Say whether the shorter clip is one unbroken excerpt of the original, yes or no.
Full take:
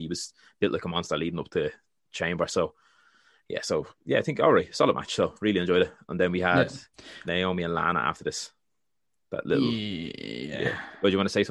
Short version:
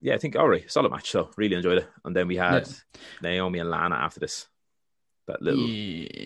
yes